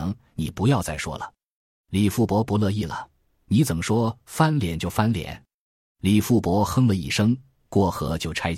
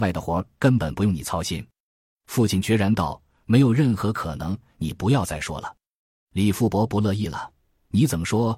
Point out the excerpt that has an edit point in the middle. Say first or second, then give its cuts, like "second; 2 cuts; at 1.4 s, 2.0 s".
first; 1 cut; at 5.6 s